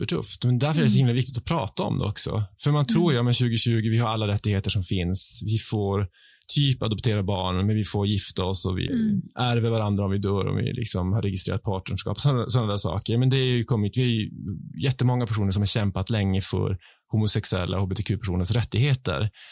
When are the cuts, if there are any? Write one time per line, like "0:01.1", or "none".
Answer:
0:08.9